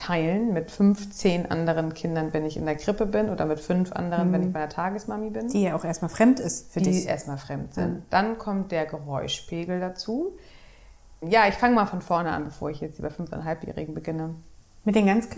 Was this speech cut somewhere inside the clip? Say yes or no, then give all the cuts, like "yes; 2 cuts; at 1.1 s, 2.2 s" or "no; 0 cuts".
yes; 1 cut; at 11.2 s